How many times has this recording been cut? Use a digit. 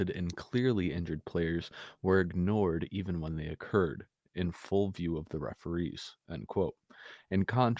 0